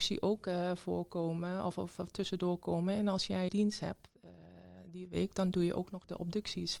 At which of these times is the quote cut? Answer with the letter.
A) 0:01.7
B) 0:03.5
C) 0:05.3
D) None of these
B